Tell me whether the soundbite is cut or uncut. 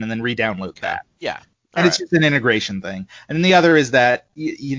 uncut